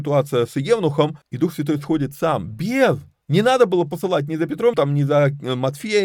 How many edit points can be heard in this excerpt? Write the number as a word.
two